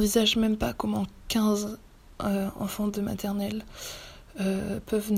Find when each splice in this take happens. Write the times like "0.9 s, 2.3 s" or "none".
none